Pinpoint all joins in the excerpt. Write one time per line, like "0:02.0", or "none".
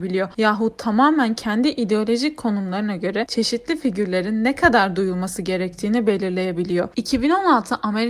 0:06.9